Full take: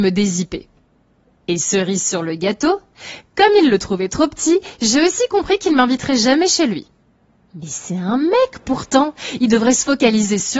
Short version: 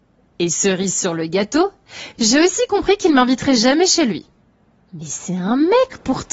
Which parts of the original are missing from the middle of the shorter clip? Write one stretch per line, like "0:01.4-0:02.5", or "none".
0:03.2-0:04.8